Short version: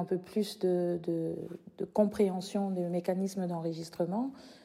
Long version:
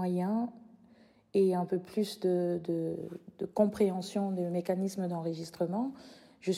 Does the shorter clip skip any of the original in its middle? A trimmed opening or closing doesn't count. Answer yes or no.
no